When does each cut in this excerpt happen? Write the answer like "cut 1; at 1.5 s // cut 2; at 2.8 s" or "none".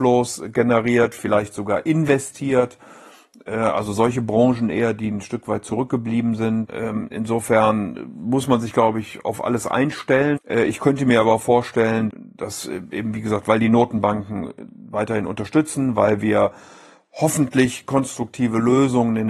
cut 1; at 6.7 s // cut 2; at 10.4 s // cut 3; at 12.1 s